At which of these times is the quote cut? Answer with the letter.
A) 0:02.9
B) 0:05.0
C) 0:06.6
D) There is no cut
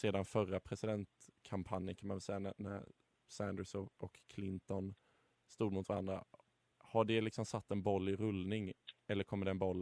D